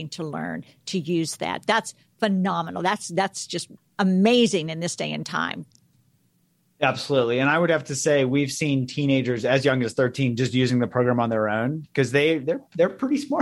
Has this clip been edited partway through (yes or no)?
no